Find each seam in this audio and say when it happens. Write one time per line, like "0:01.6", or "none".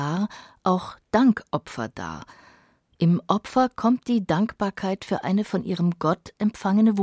0:02.8